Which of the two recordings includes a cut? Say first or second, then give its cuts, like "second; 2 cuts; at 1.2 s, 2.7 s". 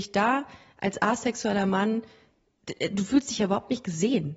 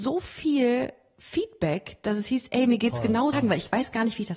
second; 1 cut; at 3.3 s